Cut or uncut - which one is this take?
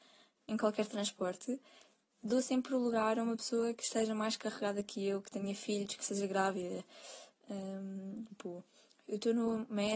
cut